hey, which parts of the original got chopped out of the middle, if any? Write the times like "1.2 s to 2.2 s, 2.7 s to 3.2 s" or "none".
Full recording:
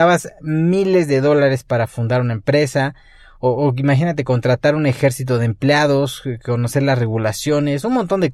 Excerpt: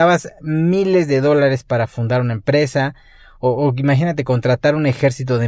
none